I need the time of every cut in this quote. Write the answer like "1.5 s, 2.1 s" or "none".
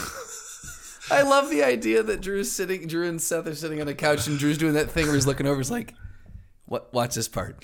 none